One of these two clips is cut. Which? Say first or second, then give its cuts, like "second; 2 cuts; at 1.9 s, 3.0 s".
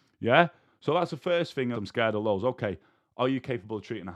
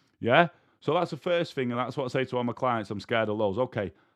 first; 1 cut; at 1.7 s